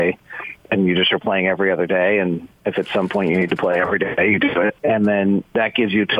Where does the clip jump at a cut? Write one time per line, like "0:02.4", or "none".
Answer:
0:04.8

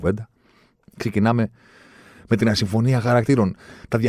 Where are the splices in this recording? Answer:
none

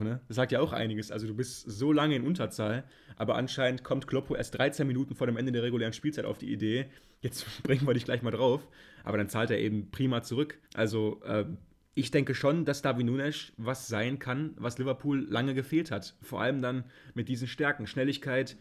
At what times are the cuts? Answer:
0:10.7

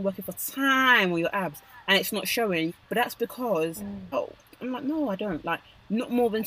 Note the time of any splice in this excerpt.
0:02.7
0:04.1

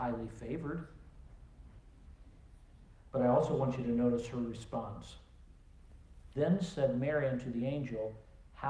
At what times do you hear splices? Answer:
0:03.1
0:06.3

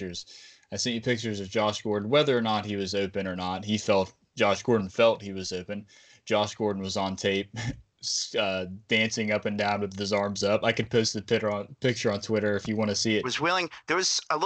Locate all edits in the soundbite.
0:13.2

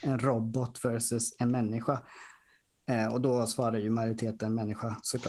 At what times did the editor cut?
none

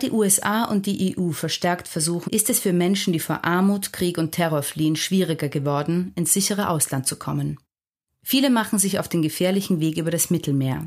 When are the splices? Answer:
0:02.3

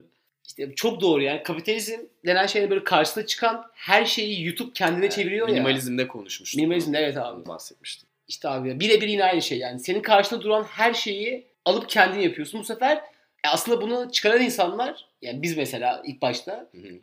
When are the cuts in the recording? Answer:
0:07.5

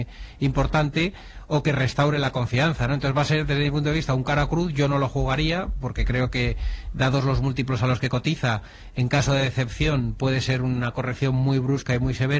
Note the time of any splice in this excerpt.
none

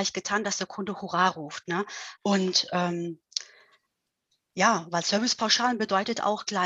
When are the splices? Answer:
0:02.2

